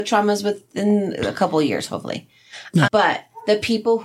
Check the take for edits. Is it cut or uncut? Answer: cut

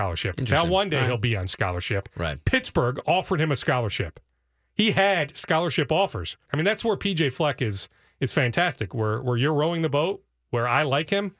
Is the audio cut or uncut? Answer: cut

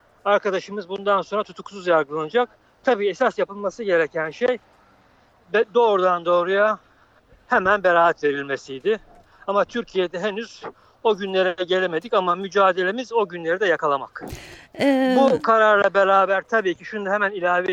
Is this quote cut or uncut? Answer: uncut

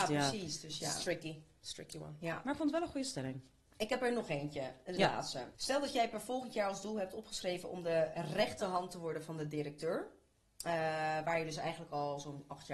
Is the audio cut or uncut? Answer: cut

